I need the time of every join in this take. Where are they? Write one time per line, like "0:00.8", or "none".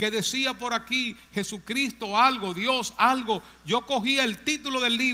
none